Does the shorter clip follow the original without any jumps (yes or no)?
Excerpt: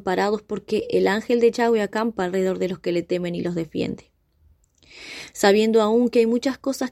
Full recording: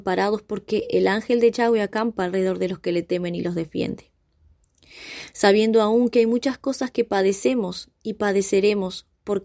yes